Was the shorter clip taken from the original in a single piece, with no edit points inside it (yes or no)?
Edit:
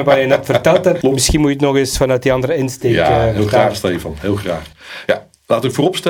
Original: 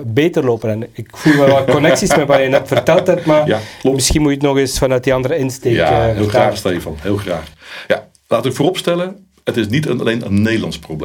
no